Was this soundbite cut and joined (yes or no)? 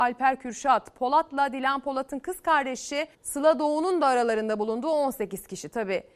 yes